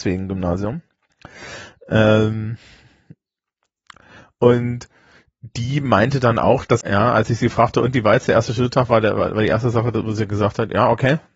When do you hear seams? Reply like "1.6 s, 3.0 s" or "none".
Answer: 6.8 s